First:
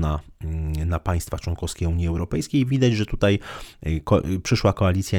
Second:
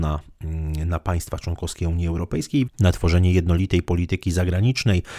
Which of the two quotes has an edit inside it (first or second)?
second